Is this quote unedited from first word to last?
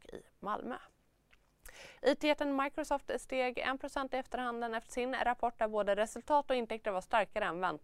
no; 1 cut; at 2.0 s

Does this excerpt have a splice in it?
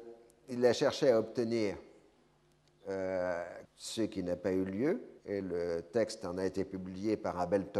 yes; 2 cuts; at 3.6 s, 5.2 s

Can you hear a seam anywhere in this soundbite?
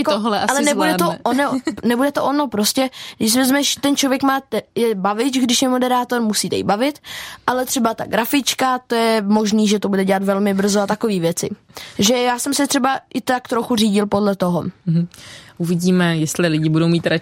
no; 0 cuts

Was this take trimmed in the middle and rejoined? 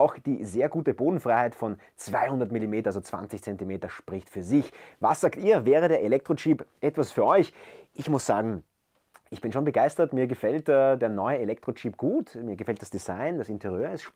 no; 0 cuts

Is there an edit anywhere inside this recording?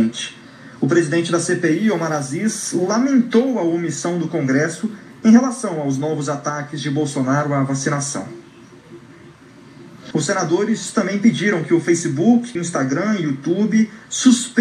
yes; 2 cuts; at 10.1 s, 12.6 s

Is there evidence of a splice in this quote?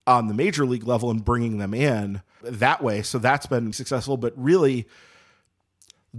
yes; 2 cuts; at 2.4 s, 3.7 s

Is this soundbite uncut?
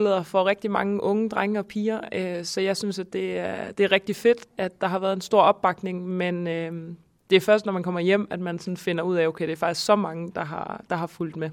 yes; 0 cuts

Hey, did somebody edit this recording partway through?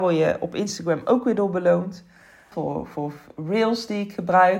yes; 1 cut; at 2.5 s

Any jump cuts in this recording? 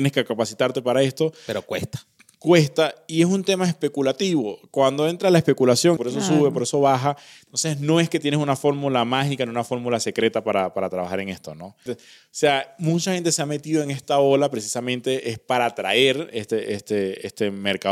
yes; 2 cuts; at 6.0 s, 11.9 s

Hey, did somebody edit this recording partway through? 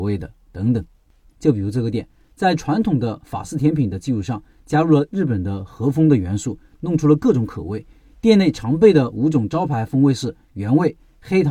yes; 1 cut; at 1.3 s

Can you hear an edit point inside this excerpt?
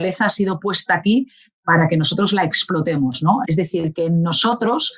yes; 1 cut; at 3.4 s

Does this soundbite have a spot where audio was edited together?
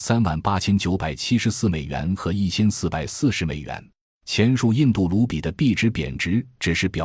yes; 1 cut; at 4.2 s

